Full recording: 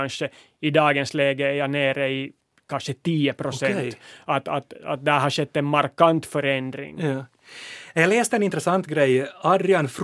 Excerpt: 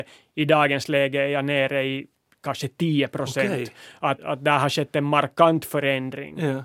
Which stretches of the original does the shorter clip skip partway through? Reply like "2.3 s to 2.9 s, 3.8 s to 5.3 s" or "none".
4.4 s to 4.8 s